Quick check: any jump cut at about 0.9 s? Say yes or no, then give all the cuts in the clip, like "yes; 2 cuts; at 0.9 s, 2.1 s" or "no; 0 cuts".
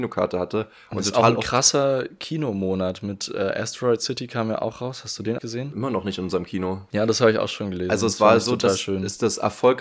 no; 2 cuts; at 5.4 s, 6.9 s